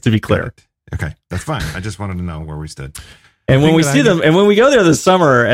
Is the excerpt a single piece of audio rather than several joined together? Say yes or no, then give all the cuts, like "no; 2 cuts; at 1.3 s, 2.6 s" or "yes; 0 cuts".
yes; 0 cuts